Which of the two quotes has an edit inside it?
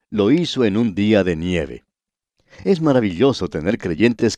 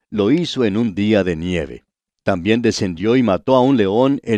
second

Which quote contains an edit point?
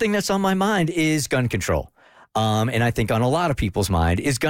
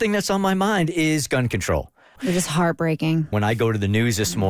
second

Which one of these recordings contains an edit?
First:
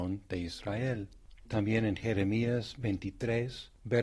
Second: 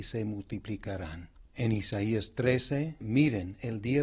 second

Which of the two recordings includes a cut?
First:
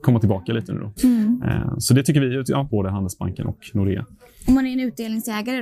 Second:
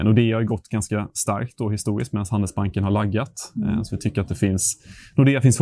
first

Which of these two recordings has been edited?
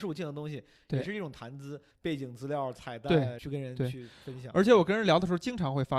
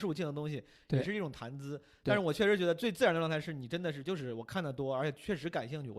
first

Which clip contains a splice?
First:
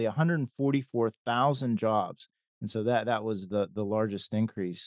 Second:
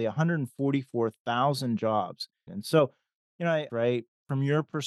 second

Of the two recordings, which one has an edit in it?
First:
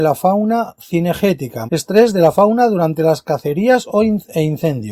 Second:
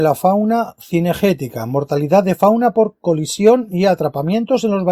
first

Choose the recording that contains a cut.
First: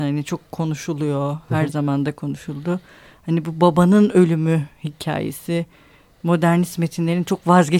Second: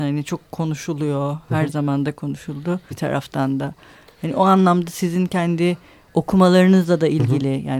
second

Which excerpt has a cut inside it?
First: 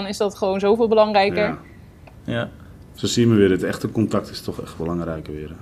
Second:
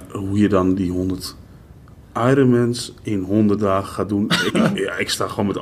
second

